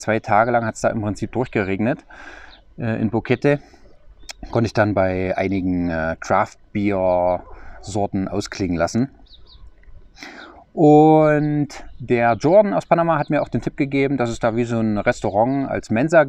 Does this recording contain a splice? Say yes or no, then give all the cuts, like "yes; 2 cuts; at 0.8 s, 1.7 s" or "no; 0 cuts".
no; 0 cuts